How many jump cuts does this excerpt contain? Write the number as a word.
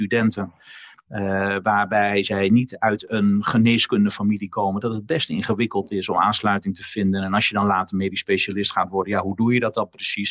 zero